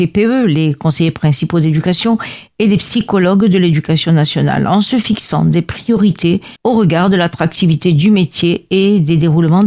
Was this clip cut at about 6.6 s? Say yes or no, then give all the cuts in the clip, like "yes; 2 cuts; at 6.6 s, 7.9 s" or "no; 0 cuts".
yes; 1 cut; at 6.6 s